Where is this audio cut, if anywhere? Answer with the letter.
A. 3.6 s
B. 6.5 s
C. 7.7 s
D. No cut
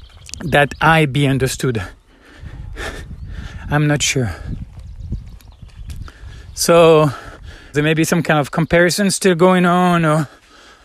C